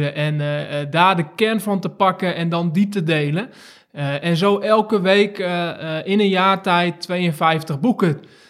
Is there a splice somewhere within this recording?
no; 0 cuts

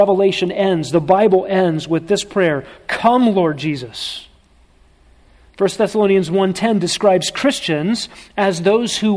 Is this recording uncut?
yes; 0 cuts

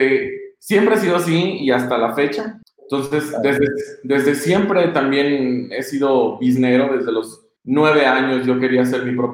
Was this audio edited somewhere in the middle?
yes; 2 cuts; at 2.6 s, 7.6 s

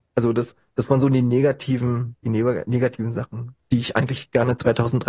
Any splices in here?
yes; 2 cuts; at 2.2 s, 3.6 s

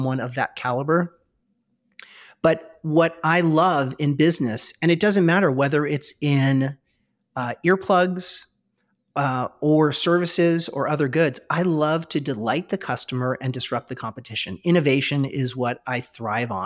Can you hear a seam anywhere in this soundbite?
no; 0 cuts

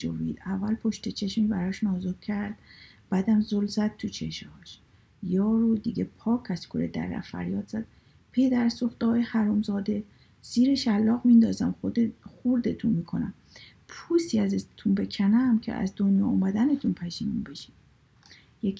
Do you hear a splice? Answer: no; 0 cuts

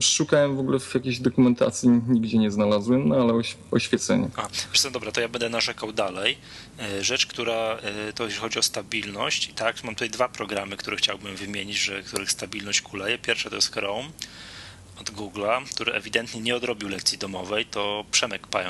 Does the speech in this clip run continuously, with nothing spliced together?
yes; 0 cuts

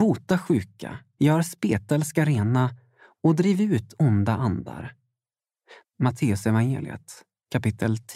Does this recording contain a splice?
yes; 2 cuts; at 1.2 s, 5.8 s

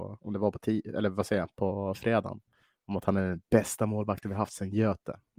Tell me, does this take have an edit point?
no; 0 cuts

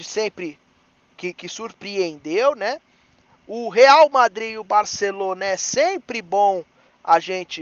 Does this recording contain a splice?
no; 0 cuts

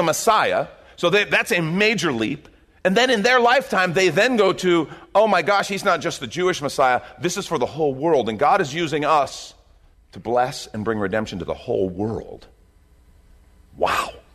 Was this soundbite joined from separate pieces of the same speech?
yes; 1 cut; at 9.9 s

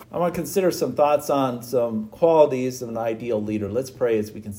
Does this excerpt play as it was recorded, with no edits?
yes; 0 cuts

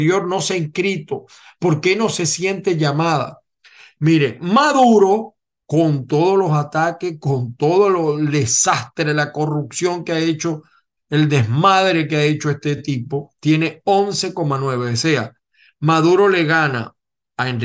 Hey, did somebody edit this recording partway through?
no; 0 cuts

